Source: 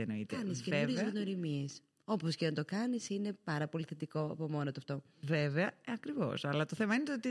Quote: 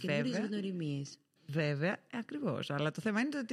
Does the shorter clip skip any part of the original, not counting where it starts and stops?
yes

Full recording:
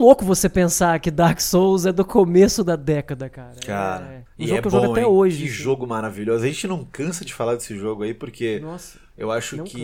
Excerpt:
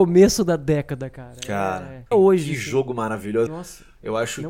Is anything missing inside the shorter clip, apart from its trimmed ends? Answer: yes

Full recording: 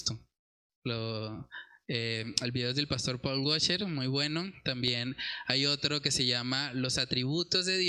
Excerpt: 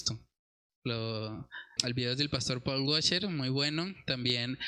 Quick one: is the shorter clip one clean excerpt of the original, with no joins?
no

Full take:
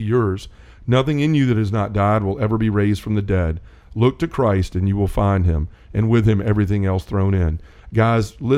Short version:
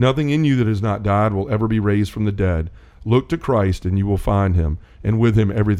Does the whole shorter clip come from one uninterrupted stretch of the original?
yes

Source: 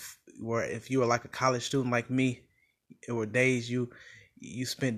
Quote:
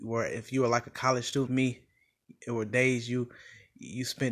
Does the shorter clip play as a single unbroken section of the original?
no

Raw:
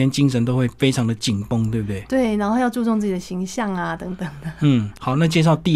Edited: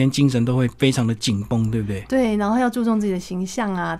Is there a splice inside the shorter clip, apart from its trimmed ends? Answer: no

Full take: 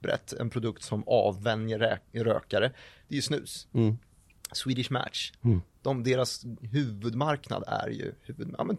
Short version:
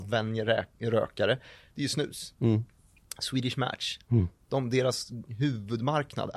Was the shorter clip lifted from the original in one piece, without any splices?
yes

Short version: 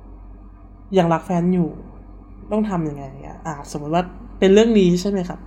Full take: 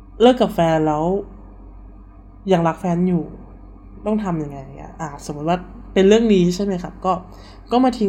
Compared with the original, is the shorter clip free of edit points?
yes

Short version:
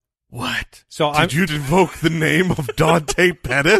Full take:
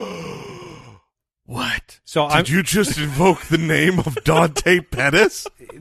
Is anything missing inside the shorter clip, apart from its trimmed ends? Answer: yes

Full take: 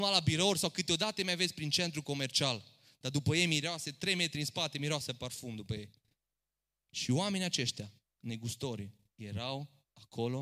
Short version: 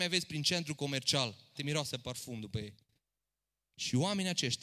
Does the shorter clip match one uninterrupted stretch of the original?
no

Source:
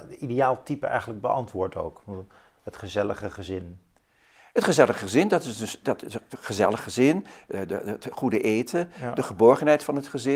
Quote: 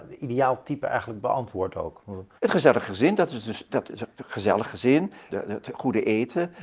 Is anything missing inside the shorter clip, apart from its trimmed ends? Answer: yes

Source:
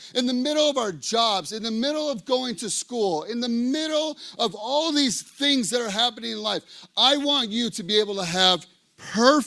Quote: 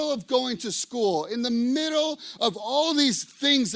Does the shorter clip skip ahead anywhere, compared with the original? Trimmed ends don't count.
no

